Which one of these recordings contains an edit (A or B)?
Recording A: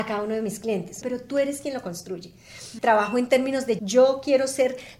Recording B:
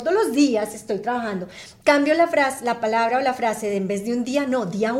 A